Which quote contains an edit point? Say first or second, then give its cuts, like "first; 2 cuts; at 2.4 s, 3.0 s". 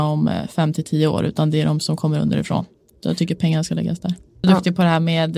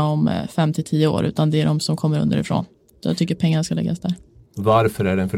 first; 1 cut; at 4.4 s